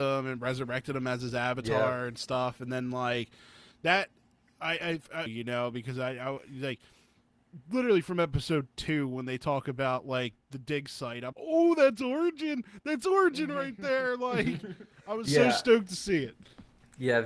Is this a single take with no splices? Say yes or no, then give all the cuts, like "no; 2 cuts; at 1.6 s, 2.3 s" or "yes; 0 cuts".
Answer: no; 2 cuts; at 5.3 s, 11.3 s